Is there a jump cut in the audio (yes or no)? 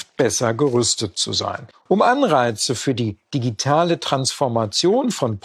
yes